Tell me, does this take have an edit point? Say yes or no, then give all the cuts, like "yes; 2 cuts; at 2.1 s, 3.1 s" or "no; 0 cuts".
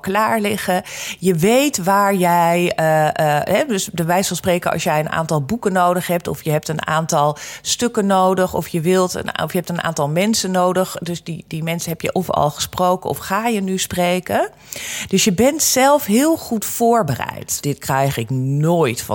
yes; 1 cut; at 17.6 s